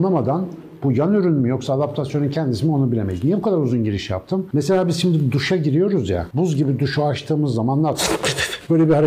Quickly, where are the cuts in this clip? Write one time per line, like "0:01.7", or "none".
none

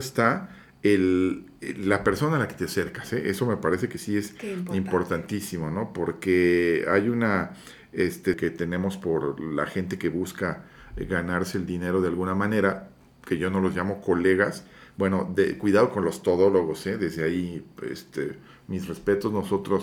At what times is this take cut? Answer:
0:08.3

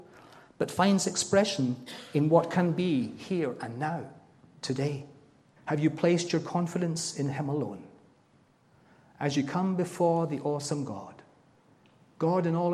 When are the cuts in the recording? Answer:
0:05.6

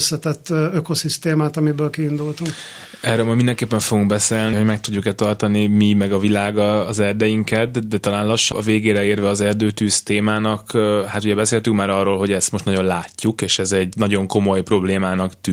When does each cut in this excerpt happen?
0:04.5
0:08.5

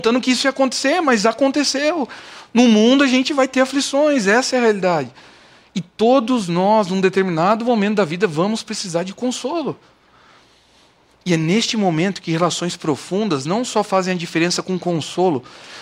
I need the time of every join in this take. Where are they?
none

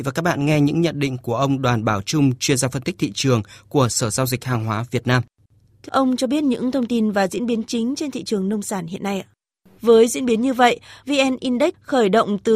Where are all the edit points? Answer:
0:05.9
0:09.8
0:11.0

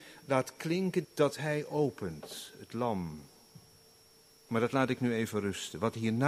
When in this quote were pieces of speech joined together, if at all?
0:01.0

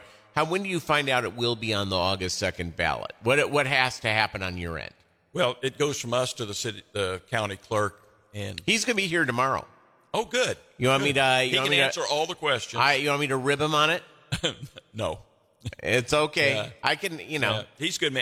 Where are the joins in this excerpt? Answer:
none

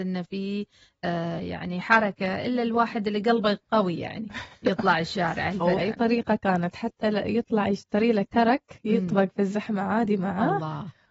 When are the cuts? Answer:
0:05.7

